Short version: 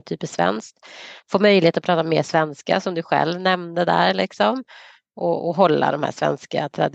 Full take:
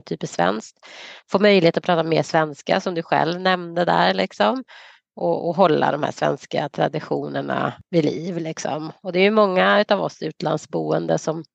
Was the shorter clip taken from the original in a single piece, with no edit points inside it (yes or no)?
yes